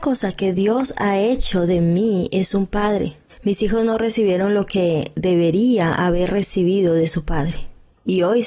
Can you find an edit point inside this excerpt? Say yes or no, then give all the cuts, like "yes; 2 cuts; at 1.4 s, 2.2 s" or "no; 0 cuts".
yes; 1 cut; at 3.3 s